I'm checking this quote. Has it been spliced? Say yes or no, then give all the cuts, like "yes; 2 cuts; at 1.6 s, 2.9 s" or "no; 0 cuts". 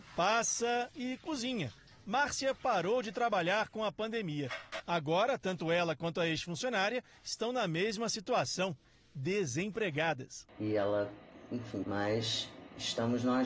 yes; 3 cuts; at 4.8 s, 10.5 s, 11.8 s